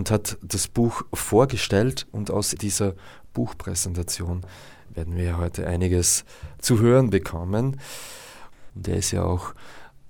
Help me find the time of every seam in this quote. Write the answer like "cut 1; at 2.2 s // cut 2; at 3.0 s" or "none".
cut 1; at 2.6 s // cut 2; at 8.7 s